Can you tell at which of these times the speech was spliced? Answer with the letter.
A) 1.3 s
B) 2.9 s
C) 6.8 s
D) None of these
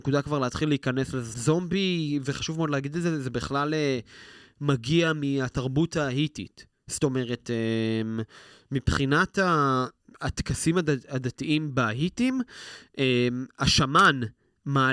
A